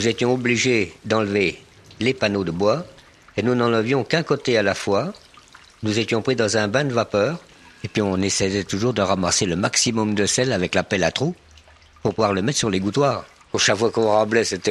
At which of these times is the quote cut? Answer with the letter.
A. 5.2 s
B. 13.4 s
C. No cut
B